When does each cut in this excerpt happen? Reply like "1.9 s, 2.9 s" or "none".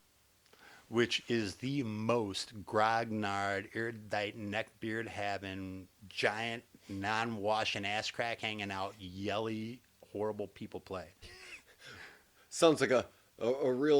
11.2 s